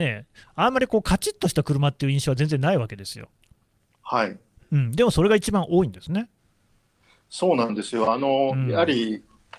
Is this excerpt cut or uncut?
uncut